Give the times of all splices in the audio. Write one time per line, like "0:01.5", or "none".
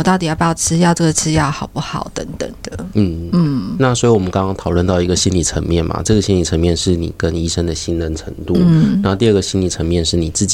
none